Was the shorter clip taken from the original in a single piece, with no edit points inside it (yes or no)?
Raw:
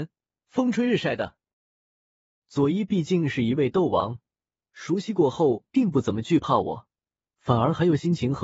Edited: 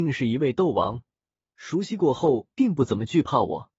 yes